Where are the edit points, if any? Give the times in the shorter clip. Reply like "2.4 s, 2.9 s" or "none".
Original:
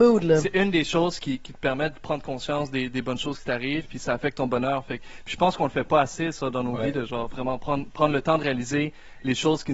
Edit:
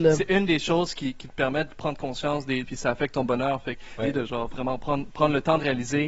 2.6 s, 4.0 s